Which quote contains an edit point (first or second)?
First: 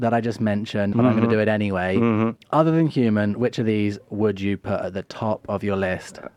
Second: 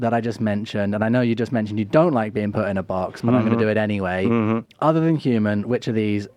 first